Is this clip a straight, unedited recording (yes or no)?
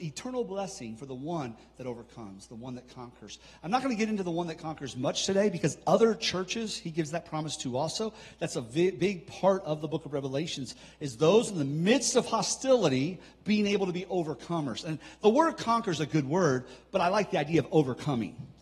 yes